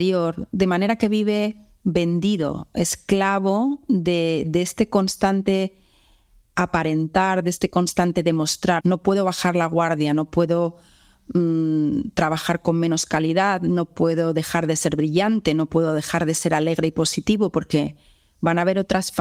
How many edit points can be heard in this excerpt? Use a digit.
1